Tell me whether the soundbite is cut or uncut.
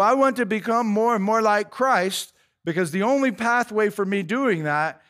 uncut